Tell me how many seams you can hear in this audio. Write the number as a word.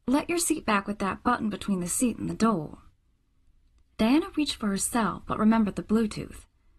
zero